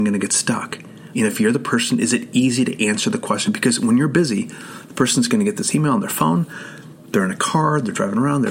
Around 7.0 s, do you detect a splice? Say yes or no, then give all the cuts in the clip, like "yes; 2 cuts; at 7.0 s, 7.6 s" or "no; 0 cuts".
no; 1 cut; at 1.1 s